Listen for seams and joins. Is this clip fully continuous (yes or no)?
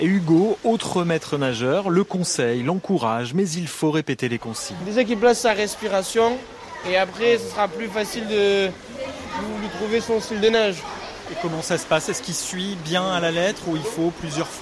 yes